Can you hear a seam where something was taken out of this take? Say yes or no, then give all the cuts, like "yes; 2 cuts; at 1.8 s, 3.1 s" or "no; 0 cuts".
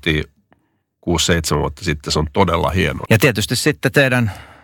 yes; 1 cut; at 3.1 s